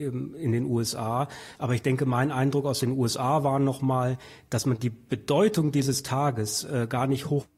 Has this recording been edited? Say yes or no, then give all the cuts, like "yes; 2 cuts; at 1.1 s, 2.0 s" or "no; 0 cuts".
yes; 1 cut; at 1.5 s